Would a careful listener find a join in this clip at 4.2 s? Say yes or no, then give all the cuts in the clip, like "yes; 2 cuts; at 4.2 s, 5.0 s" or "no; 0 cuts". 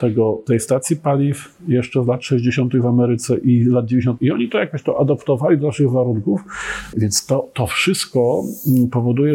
yes; 2 cuts; at 4.2 s, 6.9 s